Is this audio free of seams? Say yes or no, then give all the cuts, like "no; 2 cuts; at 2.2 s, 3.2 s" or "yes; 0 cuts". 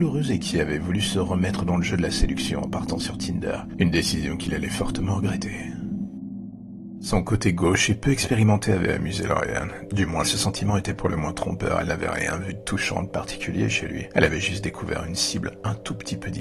no; 1 cut; at 10.2 s